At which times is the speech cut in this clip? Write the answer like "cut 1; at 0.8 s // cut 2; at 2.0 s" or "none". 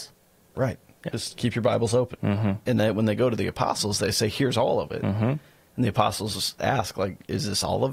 cut 1; at 2.2 s